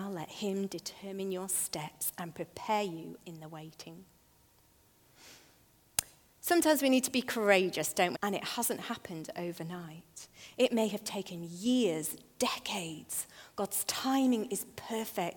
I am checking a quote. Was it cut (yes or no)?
yes